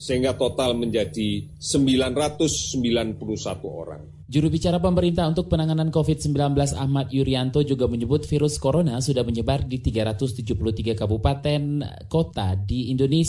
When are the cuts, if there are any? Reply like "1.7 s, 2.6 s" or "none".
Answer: none